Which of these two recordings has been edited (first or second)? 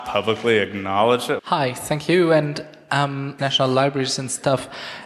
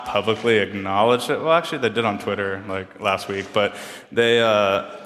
first